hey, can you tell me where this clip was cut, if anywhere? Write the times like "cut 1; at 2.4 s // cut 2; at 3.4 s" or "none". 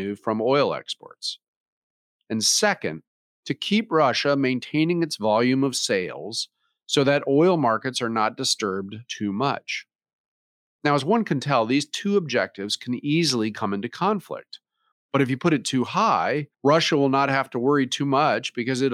cut 1; at 14.9 s // cut 2; at 16.5 s